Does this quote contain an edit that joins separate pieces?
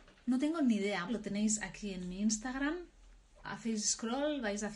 yes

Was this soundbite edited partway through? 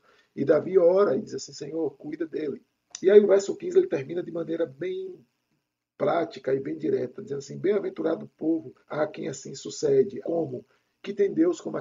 yes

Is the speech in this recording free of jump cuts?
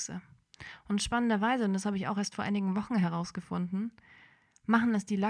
yes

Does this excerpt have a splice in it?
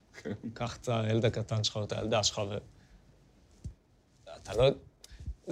no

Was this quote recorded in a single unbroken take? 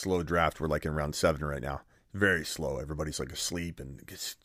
yes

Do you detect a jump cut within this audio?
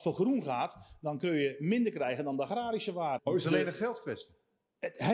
yes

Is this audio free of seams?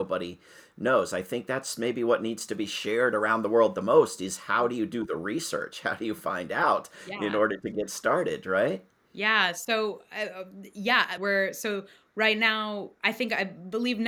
no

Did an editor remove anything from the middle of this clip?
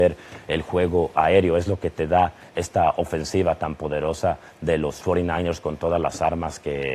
no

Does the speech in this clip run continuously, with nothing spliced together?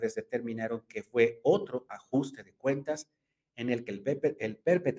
yes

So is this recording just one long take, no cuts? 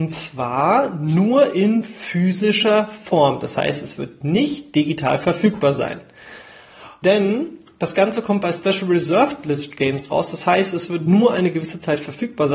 no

